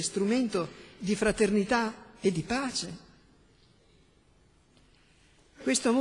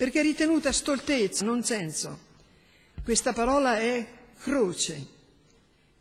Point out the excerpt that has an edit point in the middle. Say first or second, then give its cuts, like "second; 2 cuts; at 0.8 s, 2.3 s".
second; 1 cut; at 1.4 s